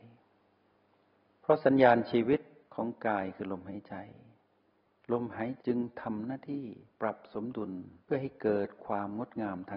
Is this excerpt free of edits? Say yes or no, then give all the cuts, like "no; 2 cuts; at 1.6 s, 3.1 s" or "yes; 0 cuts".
no; 2 cuts; at 5.6 s, 8.0 s